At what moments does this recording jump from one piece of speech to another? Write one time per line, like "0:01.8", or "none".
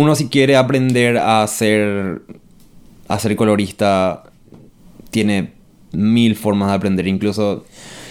none